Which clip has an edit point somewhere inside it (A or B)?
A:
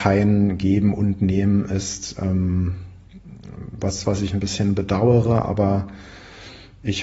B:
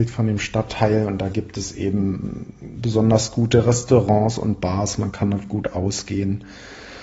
A